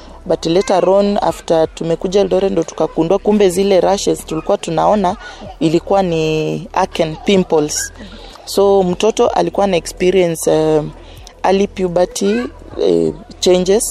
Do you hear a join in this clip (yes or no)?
no